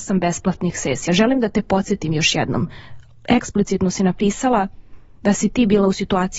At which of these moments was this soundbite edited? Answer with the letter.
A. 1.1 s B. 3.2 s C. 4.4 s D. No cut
D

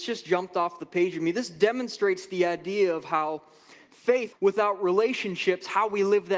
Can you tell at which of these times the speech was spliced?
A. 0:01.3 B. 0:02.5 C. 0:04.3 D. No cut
C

